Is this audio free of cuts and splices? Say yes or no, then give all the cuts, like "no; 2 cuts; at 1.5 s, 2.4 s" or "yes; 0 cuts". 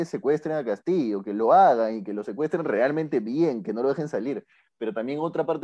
yes; 0 cuts